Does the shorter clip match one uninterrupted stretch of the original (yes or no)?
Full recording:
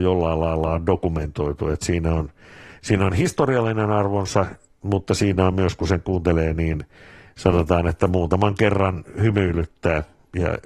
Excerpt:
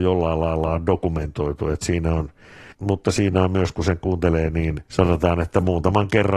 no